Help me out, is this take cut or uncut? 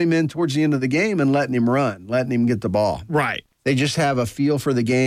cut